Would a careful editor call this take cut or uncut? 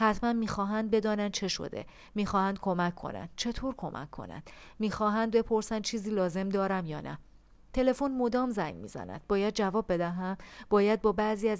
uncut